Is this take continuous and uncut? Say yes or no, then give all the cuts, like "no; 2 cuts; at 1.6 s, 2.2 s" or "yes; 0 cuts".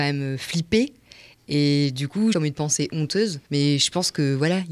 no; 2 cuts; at 2.3 s, 3.4 s